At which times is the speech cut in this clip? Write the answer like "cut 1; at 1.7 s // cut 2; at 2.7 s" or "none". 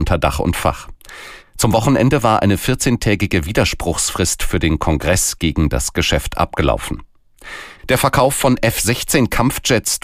cut 1; at 1.4 s // cut 2; at 7.8 s